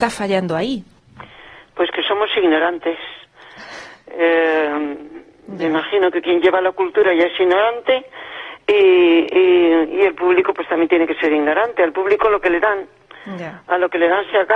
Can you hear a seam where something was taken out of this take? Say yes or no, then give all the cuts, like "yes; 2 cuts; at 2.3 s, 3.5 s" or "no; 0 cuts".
no; 0 cuts